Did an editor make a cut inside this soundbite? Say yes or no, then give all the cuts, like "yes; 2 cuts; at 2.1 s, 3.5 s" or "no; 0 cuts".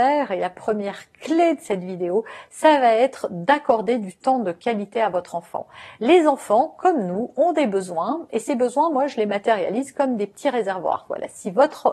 no; 0 cuts